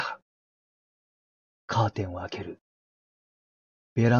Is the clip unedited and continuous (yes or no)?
yes